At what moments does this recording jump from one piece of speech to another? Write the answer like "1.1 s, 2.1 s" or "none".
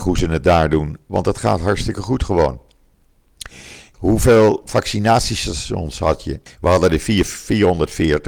3.9 s, 6.5 s